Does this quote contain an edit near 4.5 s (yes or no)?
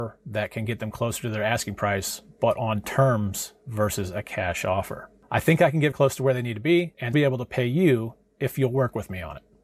no